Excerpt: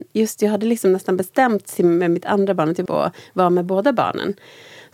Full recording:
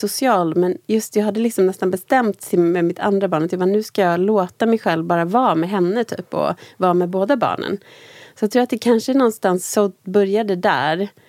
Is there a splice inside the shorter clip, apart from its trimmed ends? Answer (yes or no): yes